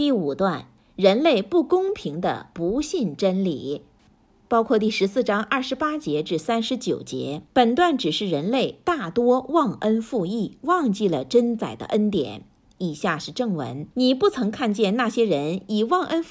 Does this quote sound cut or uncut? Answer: cut